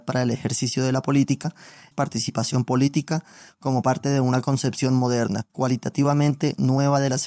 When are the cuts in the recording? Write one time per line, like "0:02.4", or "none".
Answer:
0:01.9
0:05.5